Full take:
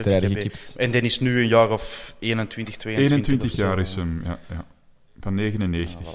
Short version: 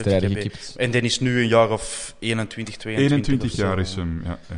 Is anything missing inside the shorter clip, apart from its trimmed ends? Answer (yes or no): no